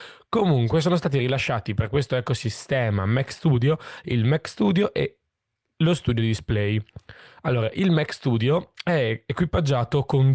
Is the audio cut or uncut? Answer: uncut